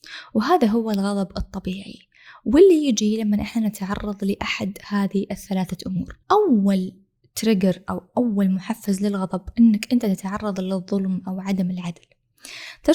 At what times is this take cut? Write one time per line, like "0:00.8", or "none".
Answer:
0:06.2

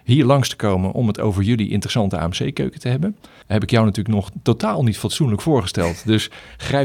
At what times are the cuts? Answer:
0:03.4

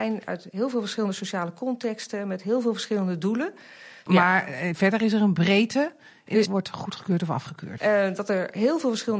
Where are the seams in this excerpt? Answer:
0:04.1
0:06.5
0:07.8

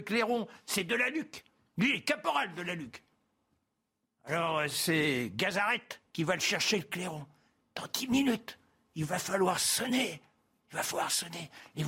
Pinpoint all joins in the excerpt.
none

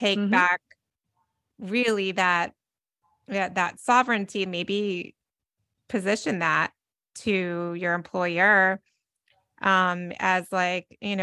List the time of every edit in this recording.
0:04.5

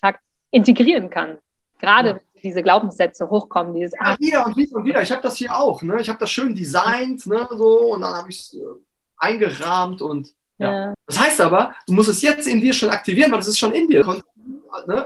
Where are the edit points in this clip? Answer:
0:10.9
0:14.0

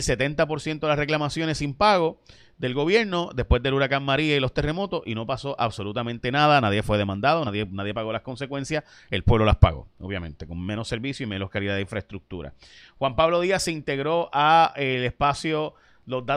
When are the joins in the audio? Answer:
none

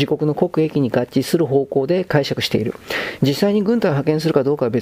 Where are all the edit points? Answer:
0:03.2

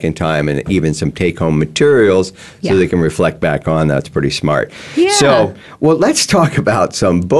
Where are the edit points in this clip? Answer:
none

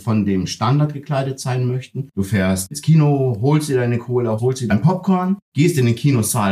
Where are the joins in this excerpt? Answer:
0:02.1
0:04.4

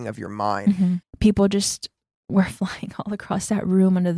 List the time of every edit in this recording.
0:01.0

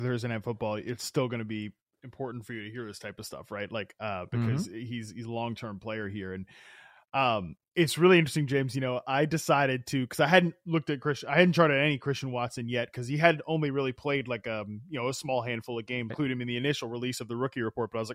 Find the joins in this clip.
0:16.1

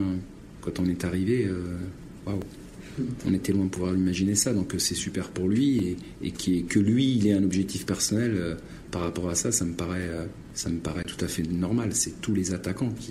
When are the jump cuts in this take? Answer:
none

